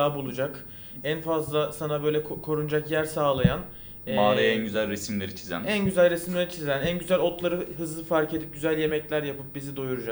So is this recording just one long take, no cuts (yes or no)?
yes